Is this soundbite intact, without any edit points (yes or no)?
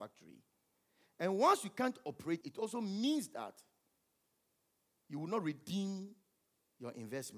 no